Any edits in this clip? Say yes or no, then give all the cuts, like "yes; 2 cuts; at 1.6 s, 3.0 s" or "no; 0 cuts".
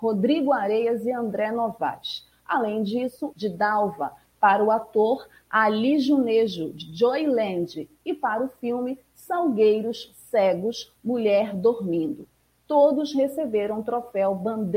yes; 1 cut; at 3.3 s